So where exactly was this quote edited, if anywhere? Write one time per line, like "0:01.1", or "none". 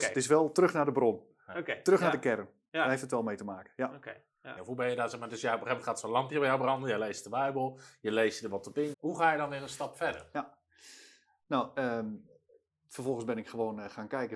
0:04.6
0:08.9